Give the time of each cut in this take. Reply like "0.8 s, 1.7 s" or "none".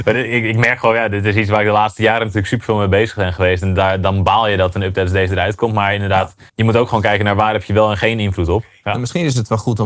6.5 s, 8.8 s